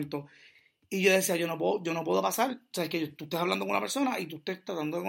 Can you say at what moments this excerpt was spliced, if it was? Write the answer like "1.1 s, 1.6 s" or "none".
none